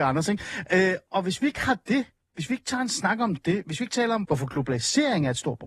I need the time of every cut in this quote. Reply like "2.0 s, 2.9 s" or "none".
4.2 s